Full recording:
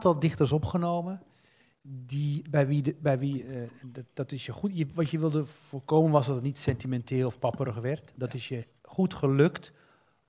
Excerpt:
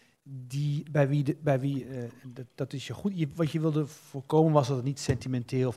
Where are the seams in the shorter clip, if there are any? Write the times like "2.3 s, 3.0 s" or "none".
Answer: none